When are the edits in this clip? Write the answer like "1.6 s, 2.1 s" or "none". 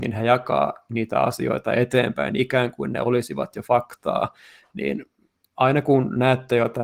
none